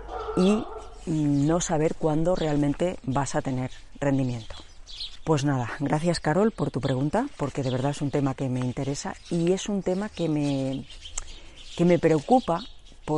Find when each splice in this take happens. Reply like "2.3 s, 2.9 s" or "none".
5.2 s